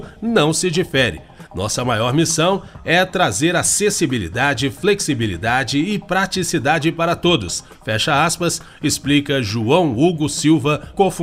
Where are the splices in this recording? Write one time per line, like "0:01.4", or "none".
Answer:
none